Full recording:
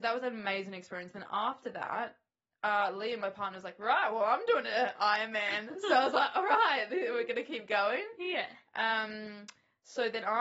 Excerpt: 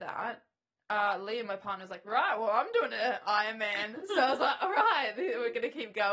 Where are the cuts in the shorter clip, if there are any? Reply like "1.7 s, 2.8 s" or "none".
none